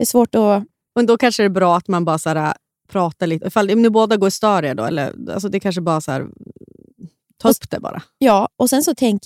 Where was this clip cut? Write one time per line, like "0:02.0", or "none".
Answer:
none